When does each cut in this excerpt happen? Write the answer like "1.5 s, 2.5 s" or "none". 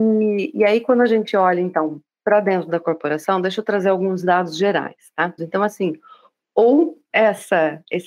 5.4 s